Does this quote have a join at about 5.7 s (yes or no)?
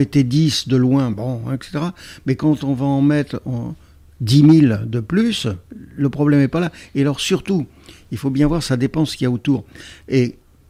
yes